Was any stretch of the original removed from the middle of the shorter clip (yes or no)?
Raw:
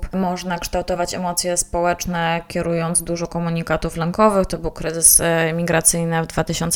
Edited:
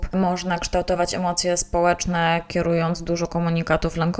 no